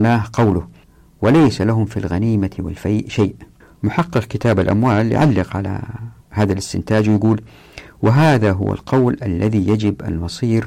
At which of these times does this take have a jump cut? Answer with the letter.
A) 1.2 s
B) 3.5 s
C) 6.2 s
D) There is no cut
C